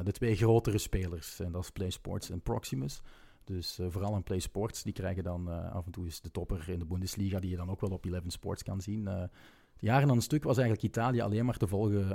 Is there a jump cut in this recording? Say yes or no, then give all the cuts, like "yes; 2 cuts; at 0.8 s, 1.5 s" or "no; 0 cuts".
no; 0 cuts